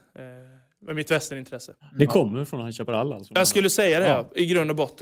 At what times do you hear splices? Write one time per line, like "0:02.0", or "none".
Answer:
none